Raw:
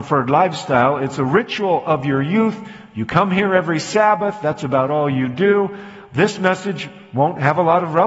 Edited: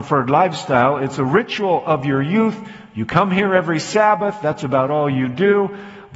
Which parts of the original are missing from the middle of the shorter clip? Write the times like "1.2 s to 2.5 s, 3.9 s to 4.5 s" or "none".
none